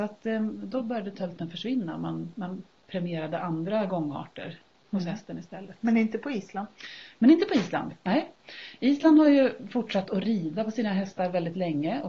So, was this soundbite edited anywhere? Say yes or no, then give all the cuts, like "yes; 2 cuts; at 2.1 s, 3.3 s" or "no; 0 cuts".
no; 0 cuts